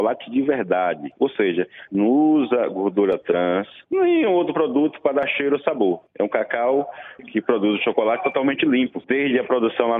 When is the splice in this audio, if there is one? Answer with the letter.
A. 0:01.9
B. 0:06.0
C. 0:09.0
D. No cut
A